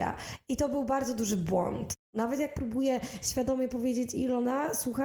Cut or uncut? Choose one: cut